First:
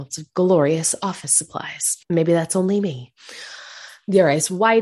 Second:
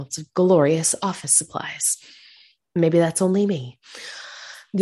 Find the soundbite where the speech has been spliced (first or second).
first